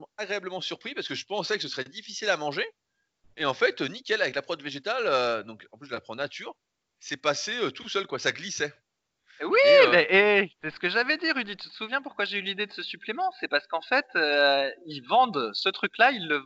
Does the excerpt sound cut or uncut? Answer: uncut